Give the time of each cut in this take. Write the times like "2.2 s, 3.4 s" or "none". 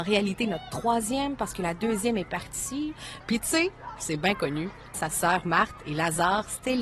3.2 s, 4.9 s